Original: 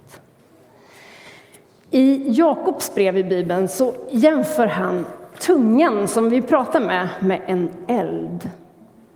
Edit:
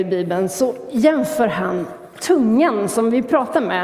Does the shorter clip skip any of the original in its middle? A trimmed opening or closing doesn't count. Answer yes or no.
no